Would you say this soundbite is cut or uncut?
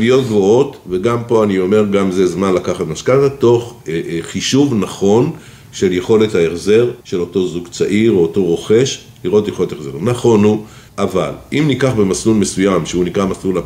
cut